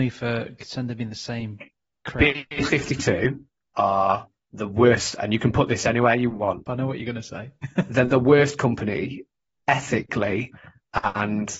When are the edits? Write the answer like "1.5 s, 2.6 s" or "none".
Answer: 6.7 s